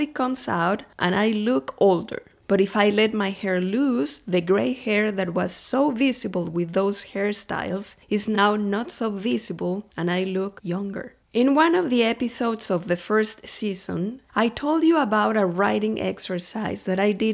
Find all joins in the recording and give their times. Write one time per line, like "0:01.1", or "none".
0:11.2
0:14.2